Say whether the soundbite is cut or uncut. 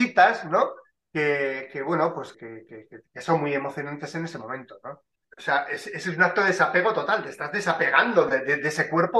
cut